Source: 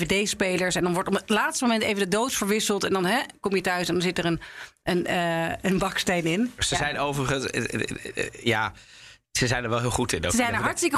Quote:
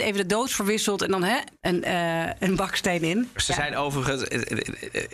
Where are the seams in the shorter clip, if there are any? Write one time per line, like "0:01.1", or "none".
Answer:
0:01.6